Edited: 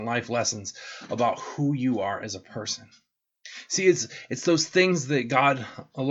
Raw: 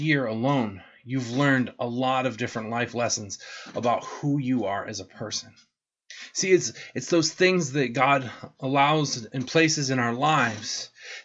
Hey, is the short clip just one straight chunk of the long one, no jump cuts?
yes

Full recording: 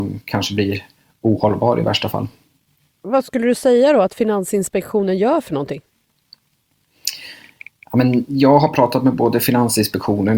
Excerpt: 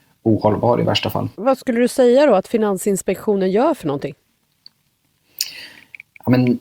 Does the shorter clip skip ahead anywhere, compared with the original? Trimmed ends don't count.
yes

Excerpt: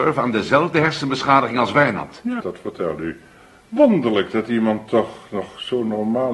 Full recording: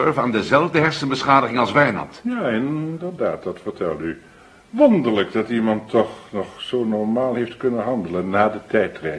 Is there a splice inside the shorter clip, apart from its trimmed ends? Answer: yes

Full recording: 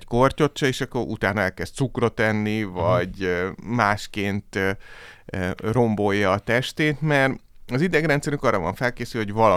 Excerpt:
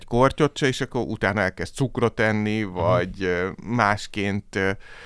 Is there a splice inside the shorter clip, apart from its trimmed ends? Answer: no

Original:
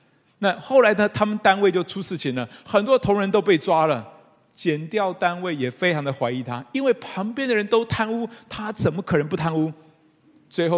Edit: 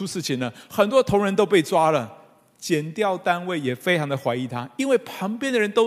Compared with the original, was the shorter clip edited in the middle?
no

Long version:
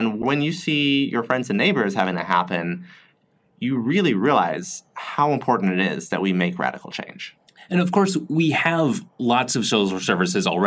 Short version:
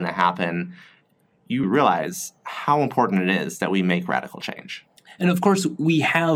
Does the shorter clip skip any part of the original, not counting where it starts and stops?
yes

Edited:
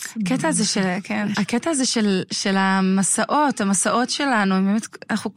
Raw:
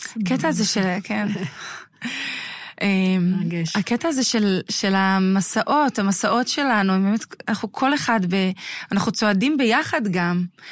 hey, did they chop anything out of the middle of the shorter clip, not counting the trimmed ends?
yes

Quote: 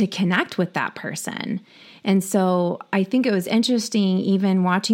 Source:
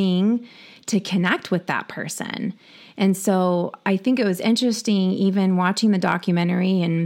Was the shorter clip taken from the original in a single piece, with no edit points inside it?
yes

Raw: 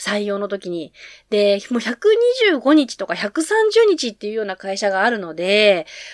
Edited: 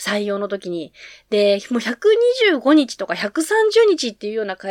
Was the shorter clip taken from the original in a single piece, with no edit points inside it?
yes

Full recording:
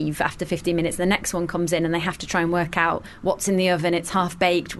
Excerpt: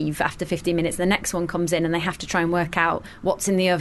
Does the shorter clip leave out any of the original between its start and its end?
no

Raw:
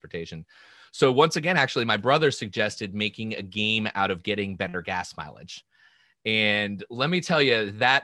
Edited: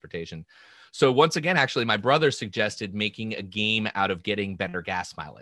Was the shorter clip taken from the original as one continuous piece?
yes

